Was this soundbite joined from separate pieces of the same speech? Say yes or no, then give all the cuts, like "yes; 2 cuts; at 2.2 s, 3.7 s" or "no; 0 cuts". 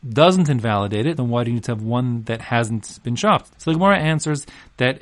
yes; 2 cuts; at 1.2 s, 3.5 s